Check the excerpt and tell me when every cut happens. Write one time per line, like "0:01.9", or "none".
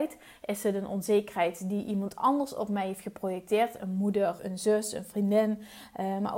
0:04.4